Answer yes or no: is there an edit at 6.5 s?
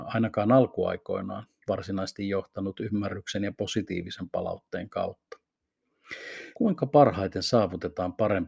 yes